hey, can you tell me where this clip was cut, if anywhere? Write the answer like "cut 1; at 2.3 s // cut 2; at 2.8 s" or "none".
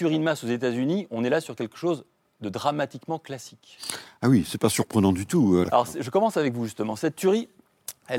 cut 1; at 5.6 s